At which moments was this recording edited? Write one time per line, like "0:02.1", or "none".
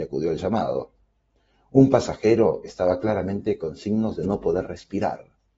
none